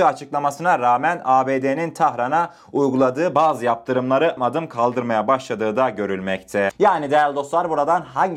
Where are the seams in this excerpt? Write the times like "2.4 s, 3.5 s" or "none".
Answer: 4.4 s, 6.7 s